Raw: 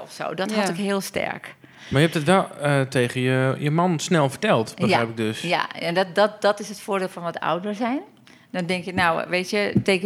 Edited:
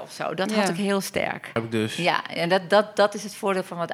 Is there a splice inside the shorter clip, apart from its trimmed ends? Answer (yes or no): yes